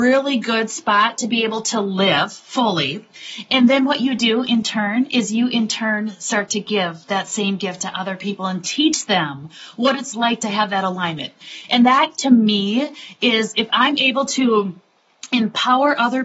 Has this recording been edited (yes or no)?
no